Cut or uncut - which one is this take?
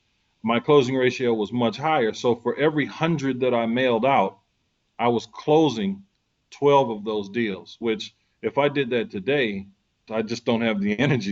cut